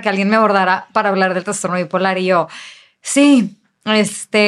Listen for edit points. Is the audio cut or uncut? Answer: uncut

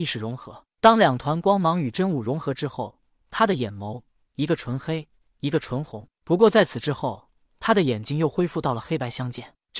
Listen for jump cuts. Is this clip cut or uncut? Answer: cut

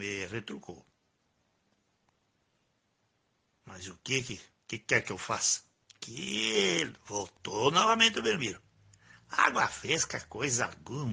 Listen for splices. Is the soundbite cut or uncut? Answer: cut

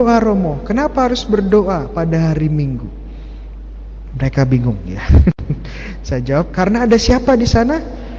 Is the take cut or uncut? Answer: uncut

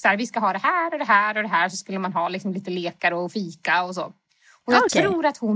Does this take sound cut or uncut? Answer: uncut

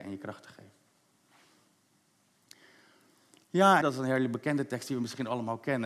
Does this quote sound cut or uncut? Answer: cut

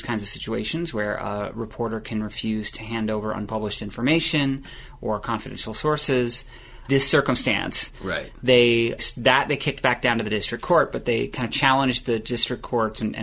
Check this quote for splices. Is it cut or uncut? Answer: cut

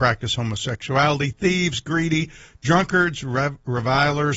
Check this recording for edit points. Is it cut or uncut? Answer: uncut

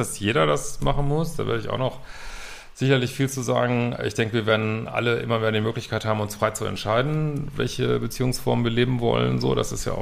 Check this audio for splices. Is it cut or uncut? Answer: uncut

